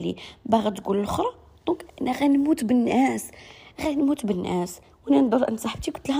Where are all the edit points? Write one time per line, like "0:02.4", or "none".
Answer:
0:01.9